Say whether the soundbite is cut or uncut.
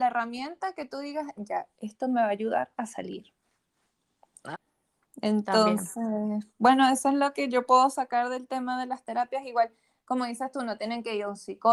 cut